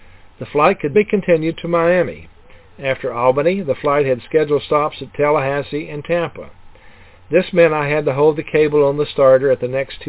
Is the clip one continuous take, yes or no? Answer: no